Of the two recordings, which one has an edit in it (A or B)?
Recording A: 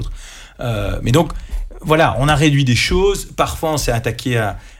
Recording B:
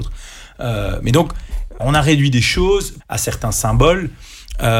B